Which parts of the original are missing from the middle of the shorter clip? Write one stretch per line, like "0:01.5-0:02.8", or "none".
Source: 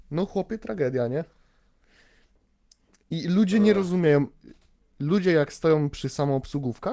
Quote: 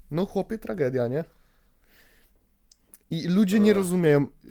none